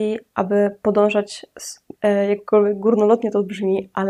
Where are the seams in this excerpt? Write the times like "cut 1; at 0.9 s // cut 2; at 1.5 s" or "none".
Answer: cut 1; at 2.0 s